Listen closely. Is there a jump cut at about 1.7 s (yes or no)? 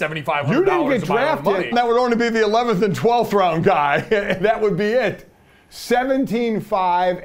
yes